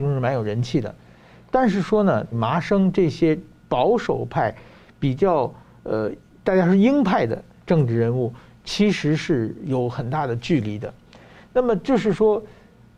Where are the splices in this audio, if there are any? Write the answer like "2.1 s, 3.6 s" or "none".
2.3 s